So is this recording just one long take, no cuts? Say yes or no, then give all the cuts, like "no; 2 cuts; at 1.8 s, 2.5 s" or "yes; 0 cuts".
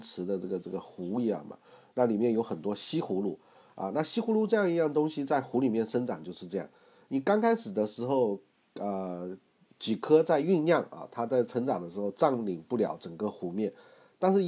yes; 0 cuts